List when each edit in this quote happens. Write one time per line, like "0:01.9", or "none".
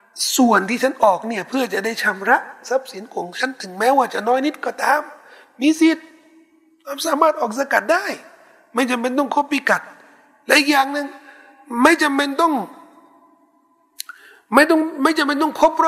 none